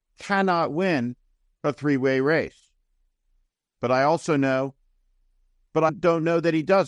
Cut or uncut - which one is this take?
cut